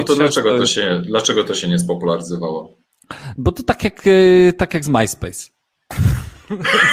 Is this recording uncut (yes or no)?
yes